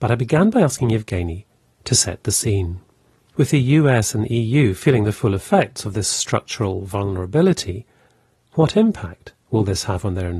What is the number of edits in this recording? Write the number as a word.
one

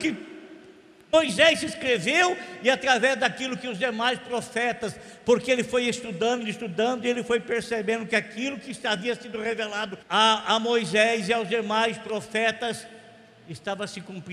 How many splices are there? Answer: two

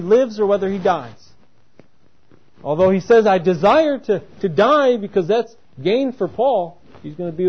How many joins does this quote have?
zero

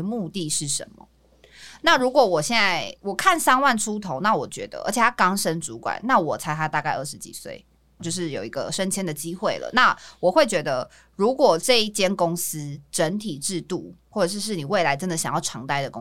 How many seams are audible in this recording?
one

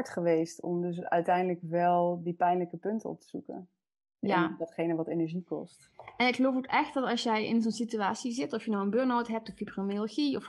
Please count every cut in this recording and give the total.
zero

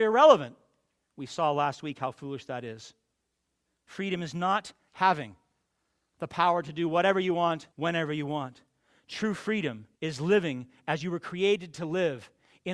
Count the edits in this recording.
two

